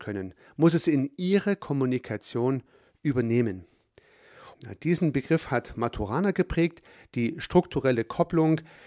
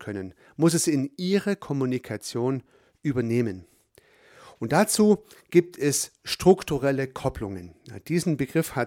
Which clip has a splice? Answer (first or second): first